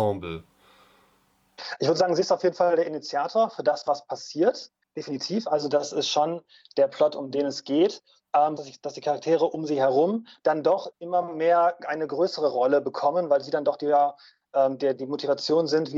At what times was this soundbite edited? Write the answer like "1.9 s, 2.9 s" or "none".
8.6 s, 15.0 s